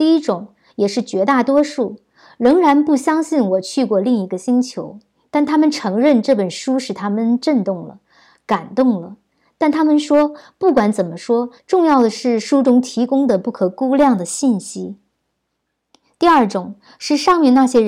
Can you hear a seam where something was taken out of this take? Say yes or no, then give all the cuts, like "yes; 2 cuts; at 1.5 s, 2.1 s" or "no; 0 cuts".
yes; 1 cut; at 11.6 s